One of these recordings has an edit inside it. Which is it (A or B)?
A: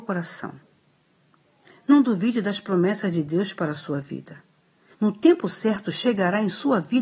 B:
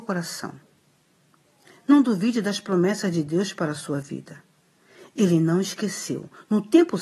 A